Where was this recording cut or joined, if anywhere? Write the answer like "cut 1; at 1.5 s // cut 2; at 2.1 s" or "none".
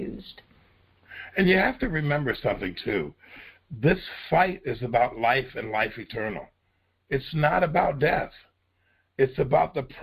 none